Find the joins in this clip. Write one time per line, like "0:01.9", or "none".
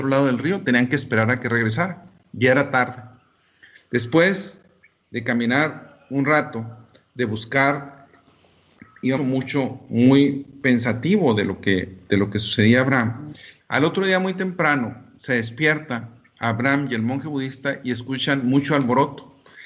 0:03.8
0:09.2
0:13.6